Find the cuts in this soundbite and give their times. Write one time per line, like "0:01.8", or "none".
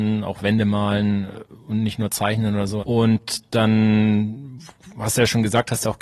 0:02.8